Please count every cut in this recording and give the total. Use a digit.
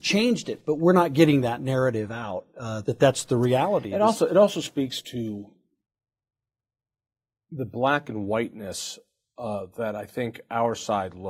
1